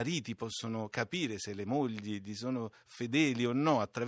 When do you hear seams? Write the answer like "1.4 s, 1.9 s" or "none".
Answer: none